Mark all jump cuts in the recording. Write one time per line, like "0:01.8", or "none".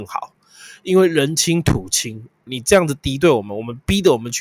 0:02.5